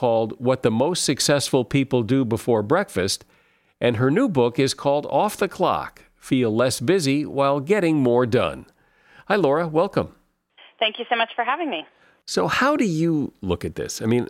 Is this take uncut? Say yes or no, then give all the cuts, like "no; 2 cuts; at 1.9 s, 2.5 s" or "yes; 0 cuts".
yes; 0 cuts